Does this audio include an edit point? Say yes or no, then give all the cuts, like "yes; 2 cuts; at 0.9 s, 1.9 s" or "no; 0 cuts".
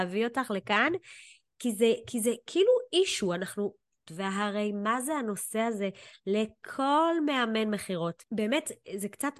yes; 2 cuts; at 4.1 s, 8.2 s